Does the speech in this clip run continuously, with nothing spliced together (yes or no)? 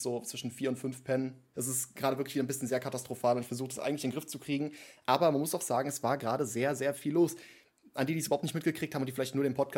no